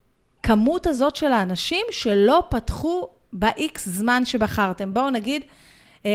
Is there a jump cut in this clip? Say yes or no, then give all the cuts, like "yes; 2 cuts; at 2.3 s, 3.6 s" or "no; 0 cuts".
no; 0 cuts